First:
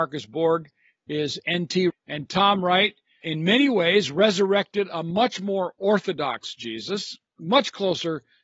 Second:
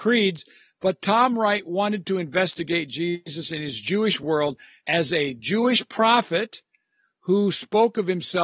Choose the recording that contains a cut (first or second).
first